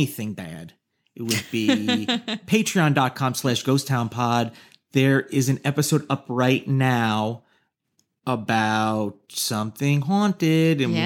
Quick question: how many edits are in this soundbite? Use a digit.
0